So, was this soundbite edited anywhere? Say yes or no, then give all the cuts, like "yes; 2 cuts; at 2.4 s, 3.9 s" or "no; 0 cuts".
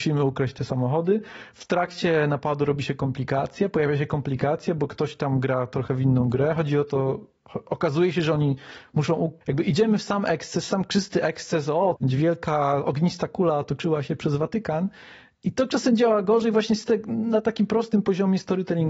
yes; 2 cuts; at 9.4 s, 12.0 s